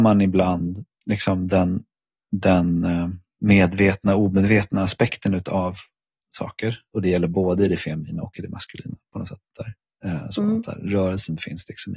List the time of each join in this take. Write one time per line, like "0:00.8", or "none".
0:06.9